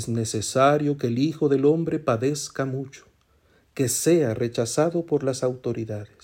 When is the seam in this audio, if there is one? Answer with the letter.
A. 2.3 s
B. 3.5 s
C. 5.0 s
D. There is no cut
D